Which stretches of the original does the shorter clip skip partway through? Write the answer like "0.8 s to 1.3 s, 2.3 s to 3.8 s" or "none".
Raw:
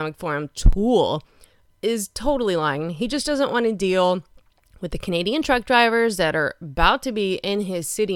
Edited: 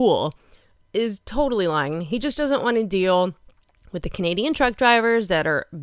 none